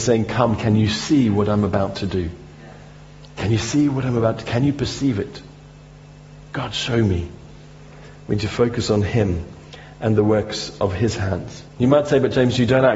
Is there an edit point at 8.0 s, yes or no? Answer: no